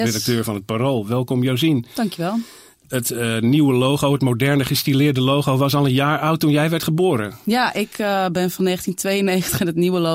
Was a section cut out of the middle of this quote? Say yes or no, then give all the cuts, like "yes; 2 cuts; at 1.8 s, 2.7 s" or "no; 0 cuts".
no; 0 cuts